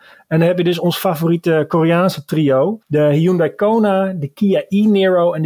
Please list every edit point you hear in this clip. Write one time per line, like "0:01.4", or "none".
0:02.8